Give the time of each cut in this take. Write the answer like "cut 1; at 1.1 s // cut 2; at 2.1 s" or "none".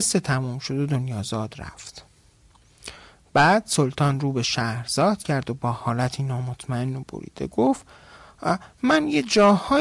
cut 1; at 7.0 s